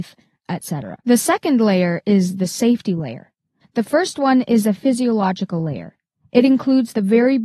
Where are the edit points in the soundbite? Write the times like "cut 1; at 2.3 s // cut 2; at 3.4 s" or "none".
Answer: cut 1; at 1.0 s // cut 2; at 3.6 s